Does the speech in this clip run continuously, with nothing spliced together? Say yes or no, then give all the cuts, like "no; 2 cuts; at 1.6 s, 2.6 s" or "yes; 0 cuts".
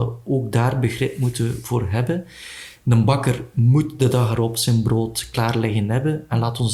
yes; 0 cuts